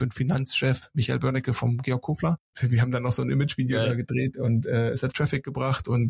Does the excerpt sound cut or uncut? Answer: cut